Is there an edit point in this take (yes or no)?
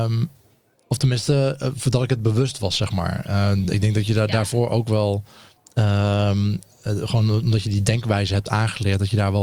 no